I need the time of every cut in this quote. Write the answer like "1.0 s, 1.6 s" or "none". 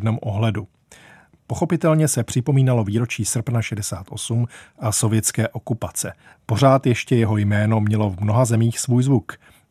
6.3 s

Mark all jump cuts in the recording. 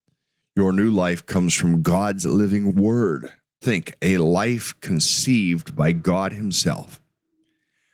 3.6 s

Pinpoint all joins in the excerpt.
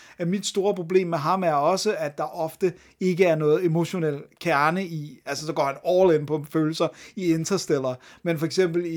none

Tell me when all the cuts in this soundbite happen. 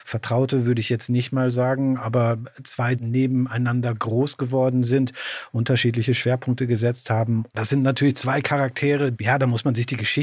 2.9 s, 7.5 s, 9.1 s

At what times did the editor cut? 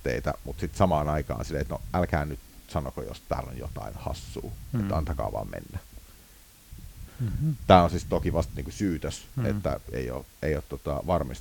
7.1 s

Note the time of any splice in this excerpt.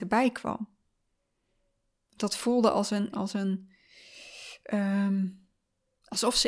3.1 s

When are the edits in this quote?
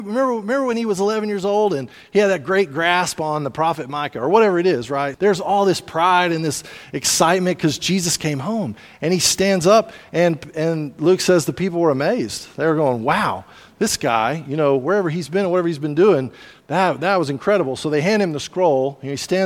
5.1 s

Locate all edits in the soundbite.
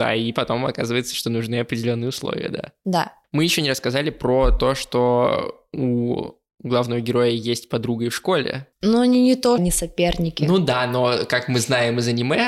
9.6 s

